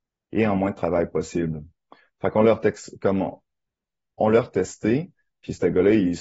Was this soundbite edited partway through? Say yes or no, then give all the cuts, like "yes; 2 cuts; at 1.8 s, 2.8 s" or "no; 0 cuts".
no; 0 cuts